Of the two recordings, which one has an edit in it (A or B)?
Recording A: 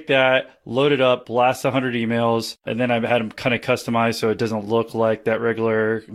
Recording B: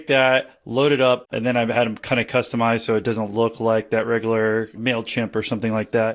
B